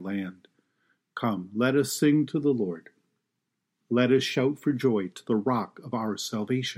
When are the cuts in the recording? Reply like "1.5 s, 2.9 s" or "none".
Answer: none